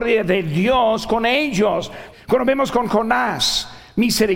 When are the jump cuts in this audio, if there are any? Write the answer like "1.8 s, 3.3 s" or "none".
2.1 s